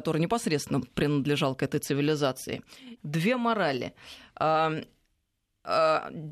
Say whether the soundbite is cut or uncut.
cut